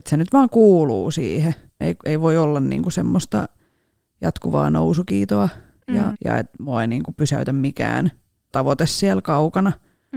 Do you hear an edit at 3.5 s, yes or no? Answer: no